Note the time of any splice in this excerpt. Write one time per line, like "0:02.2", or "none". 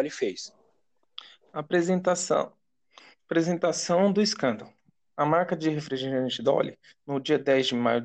none